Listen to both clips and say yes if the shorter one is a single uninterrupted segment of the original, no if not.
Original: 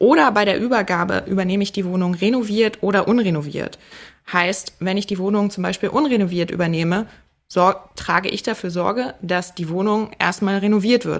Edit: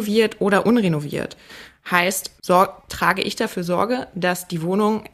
no